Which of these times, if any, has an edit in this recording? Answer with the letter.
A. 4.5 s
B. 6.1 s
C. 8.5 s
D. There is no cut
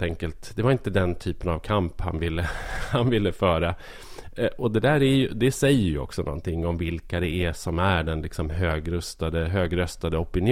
D